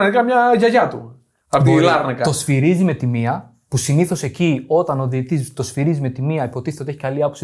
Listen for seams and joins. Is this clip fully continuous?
yes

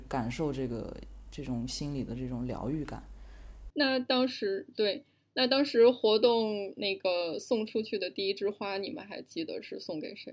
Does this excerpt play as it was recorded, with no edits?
no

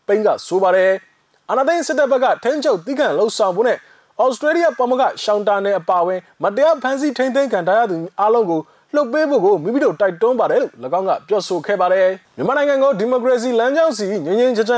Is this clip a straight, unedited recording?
no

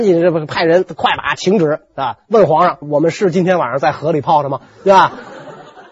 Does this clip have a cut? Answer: yes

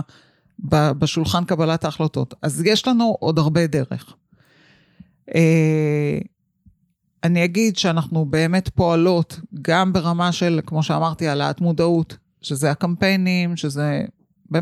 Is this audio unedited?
yes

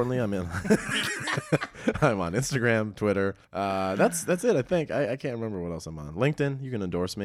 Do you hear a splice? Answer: yes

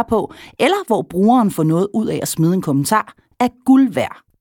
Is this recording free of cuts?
yes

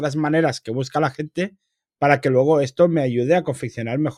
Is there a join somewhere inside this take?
no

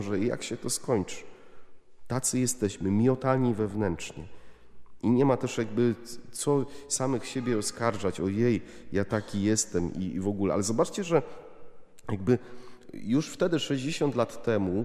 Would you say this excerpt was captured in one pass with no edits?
yes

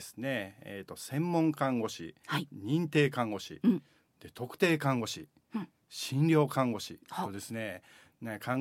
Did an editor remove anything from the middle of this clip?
no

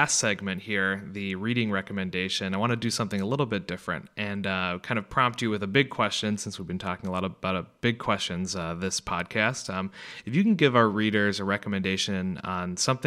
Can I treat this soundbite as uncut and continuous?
yes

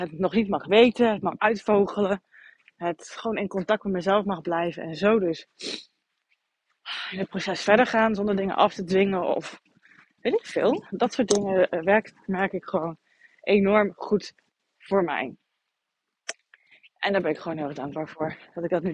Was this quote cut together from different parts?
yes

